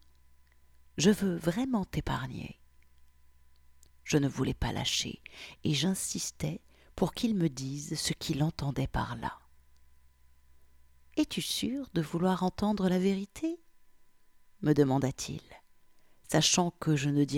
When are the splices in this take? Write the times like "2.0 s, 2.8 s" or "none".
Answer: none